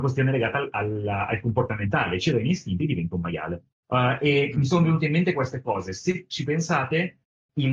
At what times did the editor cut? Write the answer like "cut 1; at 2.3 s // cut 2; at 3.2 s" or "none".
none